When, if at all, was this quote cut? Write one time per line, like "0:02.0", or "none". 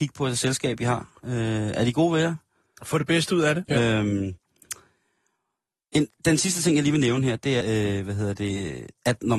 0:03.6
0:07.6